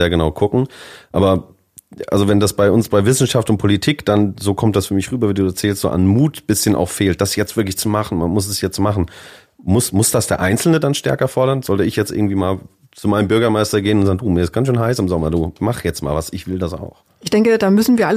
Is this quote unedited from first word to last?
yes; 0 cuts

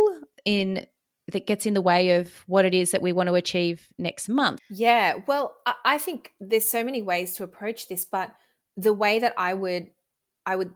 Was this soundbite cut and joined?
yes; 1 cut; at 4.6 s

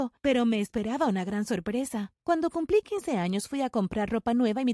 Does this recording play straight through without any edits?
yes; 0 cuts

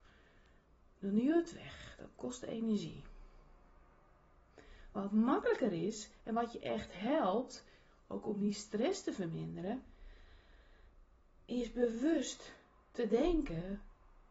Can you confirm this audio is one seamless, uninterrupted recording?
yes; 0 cuts

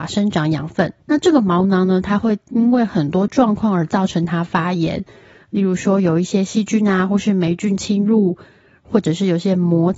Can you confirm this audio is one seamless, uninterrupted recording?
no; 1 cut; at 1.0 s

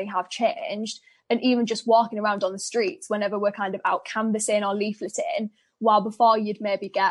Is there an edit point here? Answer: no; 0 cuts

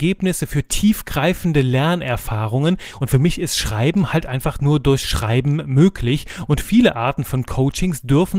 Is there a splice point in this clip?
no; 0 cuts

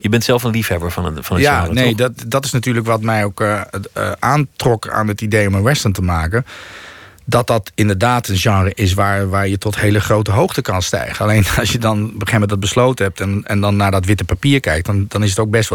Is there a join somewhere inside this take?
no; 0 cuts

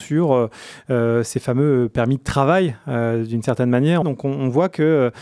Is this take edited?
yes; 1 cut; at 4.0 s

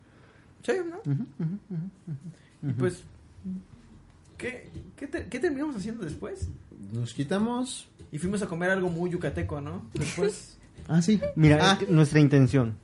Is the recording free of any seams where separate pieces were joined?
yes; 0 cuts

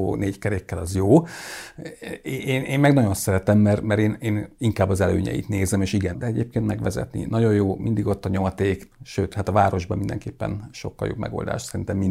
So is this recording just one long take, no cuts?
no; 2 cuts; at 6.1 s, 8.9 s

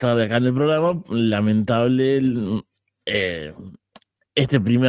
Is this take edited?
no; 0 cuts

